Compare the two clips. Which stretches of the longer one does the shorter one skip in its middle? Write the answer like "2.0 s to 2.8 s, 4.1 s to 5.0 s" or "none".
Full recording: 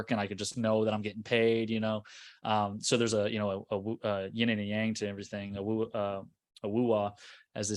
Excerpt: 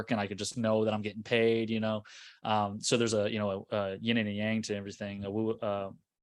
3.7 s to 4.0 s